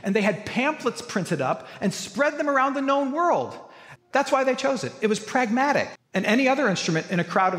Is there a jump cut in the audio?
yes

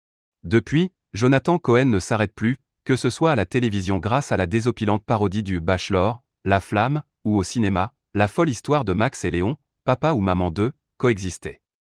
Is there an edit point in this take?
no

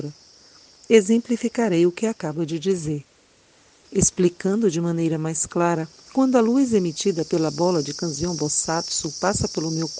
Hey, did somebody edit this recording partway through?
yes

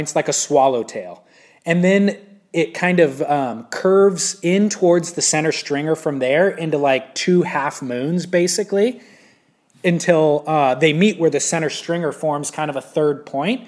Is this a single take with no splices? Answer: yes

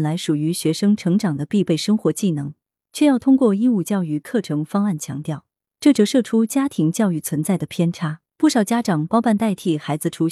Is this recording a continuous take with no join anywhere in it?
no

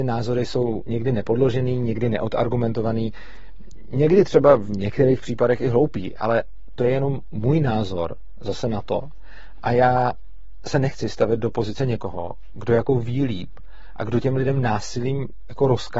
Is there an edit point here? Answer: no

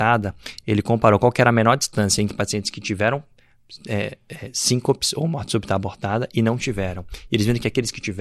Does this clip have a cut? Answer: no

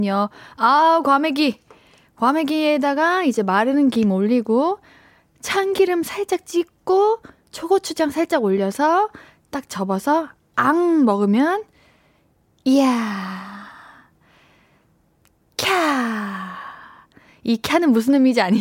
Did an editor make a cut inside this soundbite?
no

